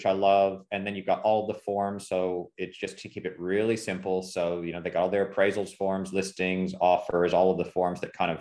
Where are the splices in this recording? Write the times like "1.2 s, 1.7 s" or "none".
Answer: none